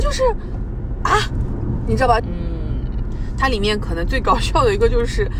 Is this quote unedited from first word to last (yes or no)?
no